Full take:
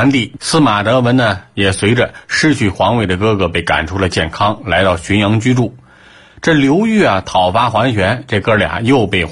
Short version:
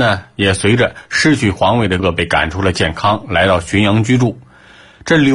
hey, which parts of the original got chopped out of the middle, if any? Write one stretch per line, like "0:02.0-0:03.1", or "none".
0:03.2-0:03.4